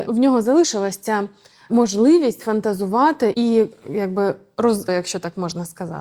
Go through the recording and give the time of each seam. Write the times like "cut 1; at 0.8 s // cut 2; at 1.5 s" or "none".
cut 1; at 3.3 s // cut 2; at 4.9 s